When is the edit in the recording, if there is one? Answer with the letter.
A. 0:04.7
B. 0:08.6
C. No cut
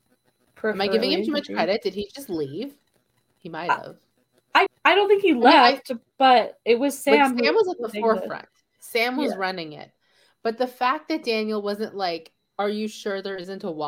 A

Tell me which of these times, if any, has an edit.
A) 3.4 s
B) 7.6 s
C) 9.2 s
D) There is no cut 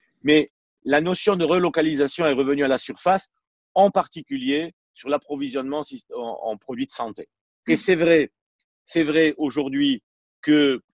B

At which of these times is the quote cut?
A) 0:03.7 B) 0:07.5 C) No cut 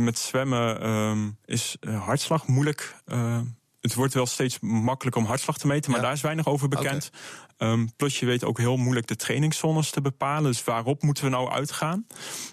C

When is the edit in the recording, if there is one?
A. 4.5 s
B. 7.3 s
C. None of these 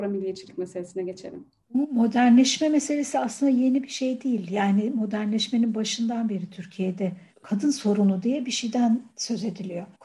B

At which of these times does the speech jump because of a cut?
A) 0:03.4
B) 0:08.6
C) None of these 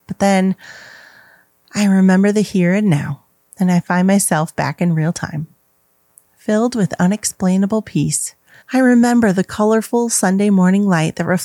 B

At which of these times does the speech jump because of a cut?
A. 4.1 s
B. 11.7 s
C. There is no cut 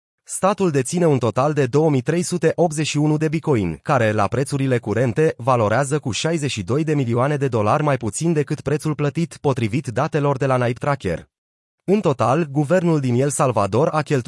B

